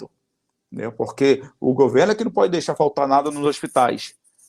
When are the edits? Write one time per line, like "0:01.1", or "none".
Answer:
none

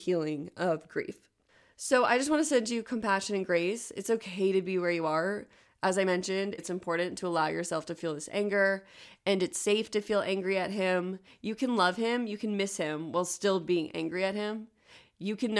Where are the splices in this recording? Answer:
0:06.6

